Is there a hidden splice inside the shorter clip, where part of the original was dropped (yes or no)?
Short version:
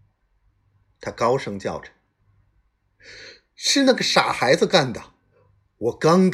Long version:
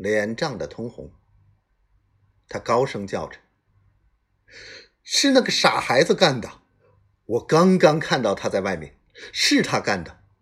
no